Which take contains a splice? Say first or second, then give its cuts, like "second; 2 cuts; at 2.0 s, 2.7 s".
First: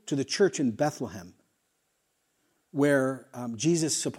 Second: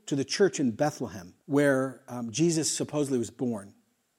second; 1 cut; at 1.4 s